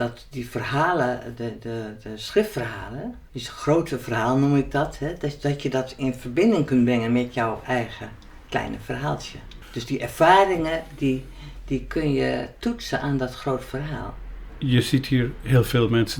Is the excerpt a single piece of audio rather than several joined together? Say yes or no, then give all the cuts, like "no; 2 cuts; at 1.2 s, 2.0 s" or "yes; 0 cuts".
no; 1 cut; at 3.3 s